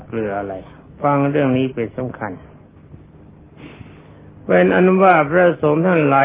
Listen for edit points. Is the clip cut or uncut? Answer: uncut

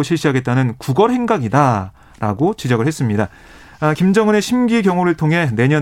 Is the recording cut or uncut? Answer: uncut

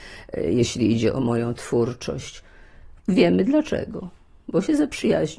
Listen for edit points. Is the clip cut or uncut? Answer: cut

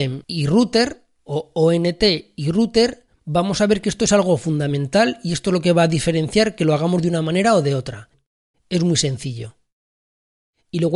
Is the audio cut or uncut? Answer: cut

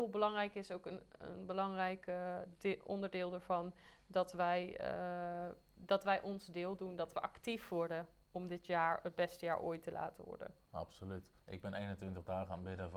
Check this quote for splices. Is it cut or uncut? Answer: cut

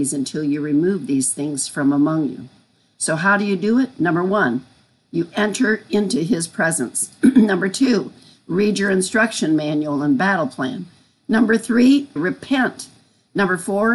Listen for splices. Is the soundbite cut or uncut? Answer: cut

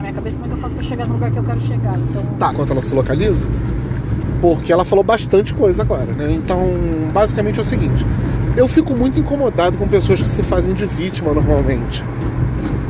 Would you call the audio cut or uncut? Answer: cut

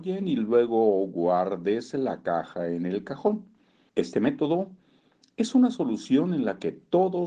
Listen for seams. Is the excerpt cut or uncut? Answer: cut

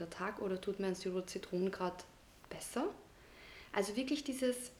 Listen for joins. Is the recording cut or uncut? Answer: uncut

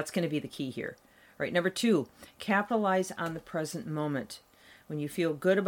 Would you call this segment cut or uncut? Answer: uncut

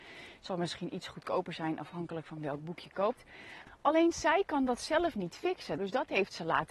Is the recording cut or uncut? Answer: cut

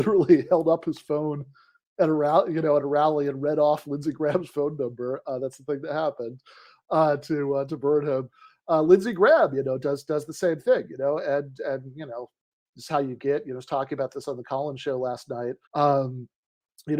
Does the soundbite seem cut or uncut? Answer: cut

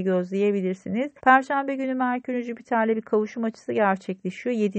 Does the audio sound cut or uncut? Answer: cut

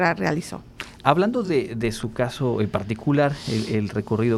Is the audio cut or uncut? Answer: uncut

